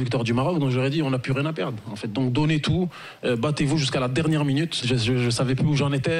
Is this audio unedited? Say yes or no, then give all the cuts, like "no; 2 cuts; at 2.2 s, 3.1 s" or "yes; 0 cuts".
no; 1 cut; at 4.8 s